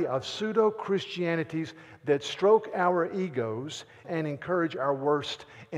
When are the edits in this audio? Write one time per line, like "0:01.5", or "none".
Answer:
0:04.0